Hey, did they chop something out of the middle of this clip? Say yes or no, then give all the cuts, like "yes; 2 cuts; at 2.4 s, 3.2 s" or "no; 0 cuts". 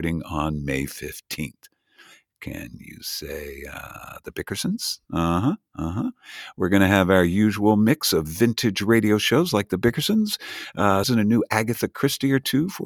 yes; 1 cut; at 11.0 s